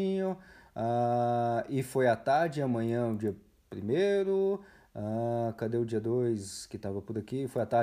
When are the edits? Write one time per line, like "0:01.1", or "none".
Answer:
none